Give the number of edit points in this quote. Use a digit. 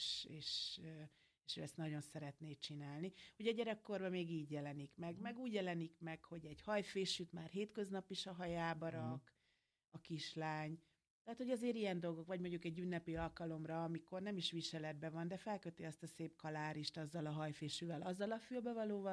0